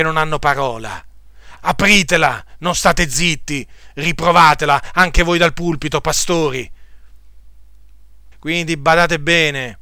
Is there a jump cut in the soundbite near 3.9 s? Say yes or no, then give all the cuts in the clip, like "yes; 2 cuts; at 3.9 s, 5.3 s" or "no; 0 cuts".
no; 2 cuts; at 1.6 s, 8.3 s